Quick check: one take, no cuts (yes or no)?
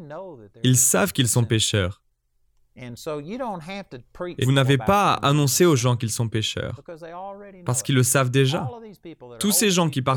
no